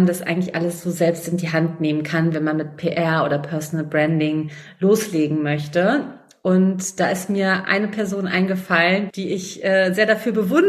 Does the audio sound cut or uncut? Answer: cut